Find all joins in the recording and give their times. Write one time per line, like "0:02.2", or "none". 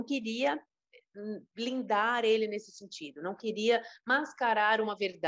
0:01.5